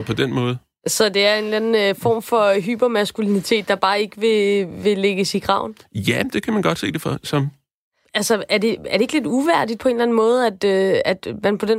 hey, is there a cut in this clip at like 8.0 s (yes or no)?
yes